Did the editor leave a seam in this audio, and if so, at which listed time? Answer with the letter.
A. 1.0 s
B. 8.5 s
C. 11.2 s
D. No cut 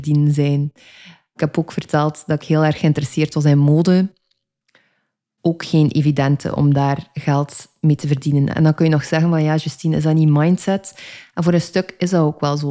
D